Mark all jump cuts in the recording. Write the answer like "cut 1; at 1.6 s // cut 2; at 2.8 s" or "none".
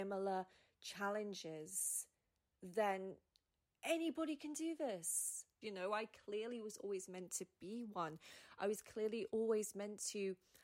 cut 1; at 5.6 s